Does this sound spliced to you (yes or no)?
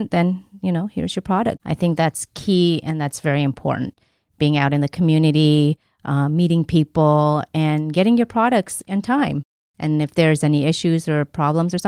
yes